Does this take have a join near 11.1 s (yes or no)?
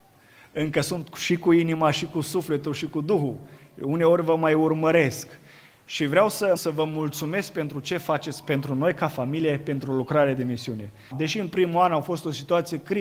yes